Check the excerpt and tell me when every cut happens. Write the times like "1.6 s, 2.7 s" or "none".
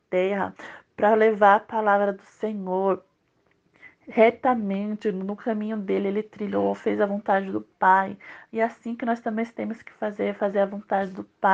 none